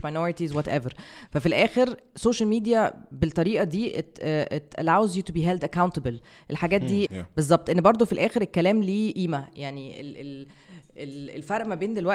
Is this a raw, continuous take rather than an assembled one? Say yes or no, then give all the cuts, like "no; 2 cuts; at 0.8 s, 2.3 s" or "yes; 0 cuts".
no; 1 cut; at 7.1 s